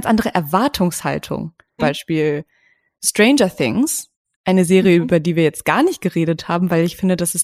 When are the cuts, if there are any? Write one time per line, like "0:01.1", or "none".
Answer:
0:01.8